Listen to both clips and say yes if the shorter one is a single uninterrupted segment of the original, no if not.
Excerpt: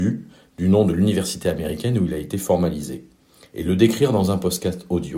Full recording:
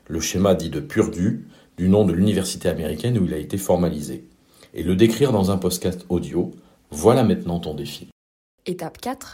yes